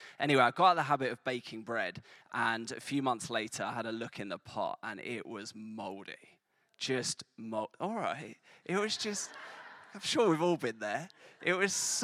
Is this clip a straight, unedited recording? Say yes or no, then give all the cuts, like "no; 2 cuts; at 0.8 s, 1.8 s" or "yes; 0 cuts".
yes; 0 cuts